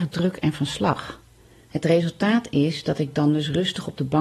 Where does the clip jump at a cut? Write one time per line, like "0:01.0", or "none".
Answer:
0:01.6